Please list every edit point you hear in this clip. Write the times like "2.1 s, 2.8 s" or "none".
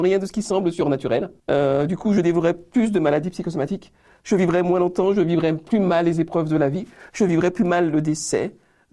1.4 s

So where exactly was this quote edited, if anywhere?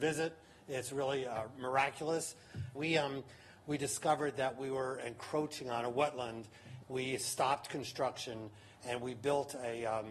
2.7 s, 6.8 s

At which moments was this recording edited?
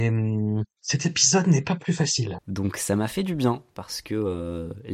2.4 s

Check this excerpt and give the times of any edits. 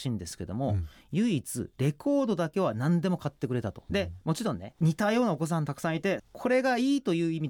3.9 s, 6.2 s

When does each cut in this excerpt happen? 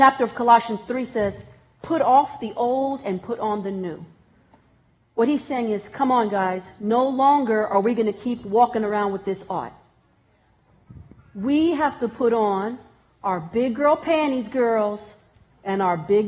none

